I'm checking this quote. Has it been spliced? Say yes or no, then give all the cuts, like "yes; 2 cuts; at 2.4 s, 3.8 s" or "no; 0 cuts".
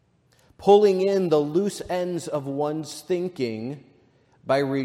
no; 0 cuts